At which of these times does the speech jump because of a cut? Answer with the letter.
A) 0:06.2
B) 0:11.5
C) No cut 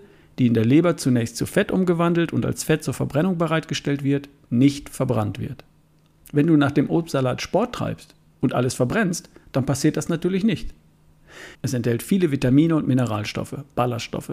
B